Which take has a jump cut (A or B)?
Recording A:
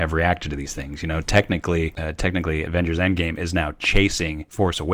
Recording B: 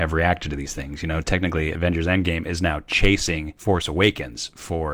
B